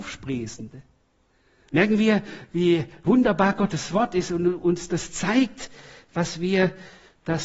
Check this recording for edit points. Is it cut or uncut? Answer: cut